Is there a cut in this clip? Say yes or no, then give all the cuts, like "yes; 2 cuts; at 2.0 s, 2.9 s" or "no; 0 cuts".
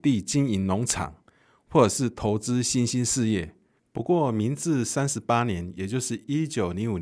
yes; 1 cut; at 3.8 s